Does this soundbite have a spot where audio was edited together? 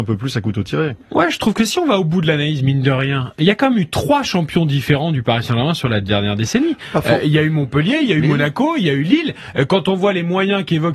no; 0 cuts

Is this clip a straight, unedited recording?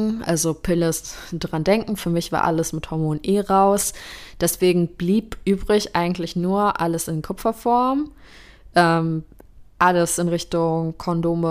yes; 0 cuts

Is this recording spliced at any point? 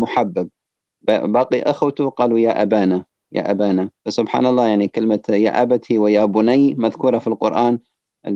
yes; 1 cut; at 4.0 s

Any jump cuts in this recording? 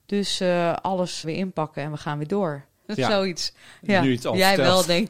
yes; 2 cuts; at 1.2 s, 2.8 s

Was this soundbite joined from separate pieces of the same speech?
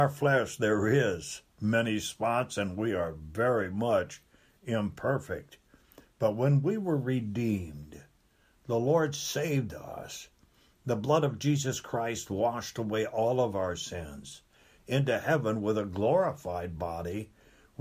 yes; 1 cut; at 14.8 s

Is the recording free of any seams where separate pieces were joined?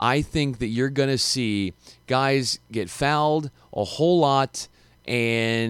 yes; 0 cuts

